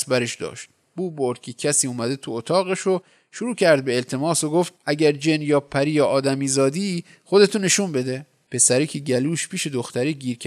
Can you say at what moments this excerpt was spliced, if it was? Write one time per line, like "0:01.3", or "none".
0:04.8